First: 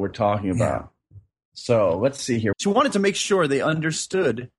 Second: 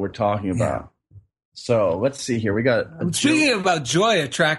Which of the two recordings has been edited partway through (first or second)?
first